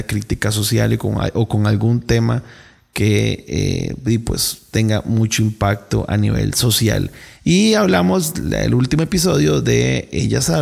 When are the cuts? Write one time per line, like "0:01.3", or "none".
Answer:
0:07.4